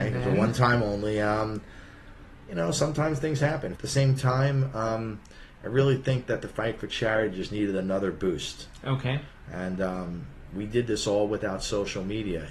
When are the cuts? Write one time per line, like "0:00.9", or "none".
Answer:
0:03.8